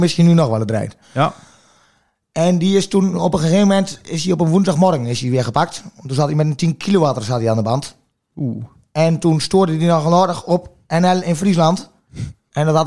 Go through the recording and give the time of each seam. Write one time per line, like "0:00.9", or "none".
0:01.0